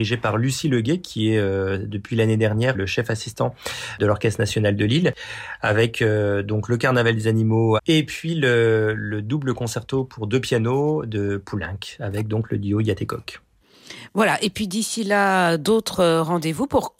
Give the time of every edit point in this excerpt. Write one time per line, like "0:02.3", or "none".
0:02.7
0:07.8